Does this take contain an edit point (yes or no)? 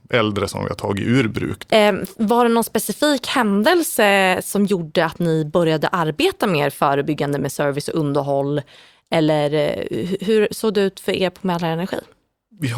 yes